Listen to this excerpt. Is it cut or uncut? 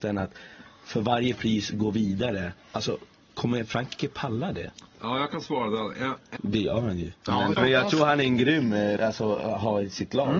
cut